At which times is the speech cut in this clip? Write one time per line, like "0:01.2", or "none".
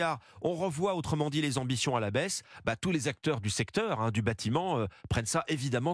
none